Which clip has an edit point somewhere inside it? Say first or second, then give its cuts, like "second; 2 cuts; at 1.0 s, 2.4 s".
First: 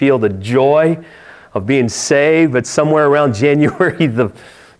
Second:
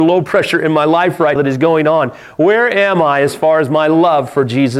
second; 1 cut; at 1.4 s